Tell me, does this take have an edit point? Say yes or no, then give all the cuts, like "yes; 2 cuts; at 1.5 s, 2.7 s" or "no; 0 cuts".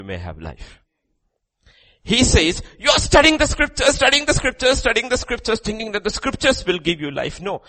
no; 0 cuts